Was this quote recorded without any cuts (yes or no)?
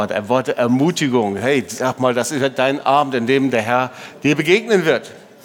yes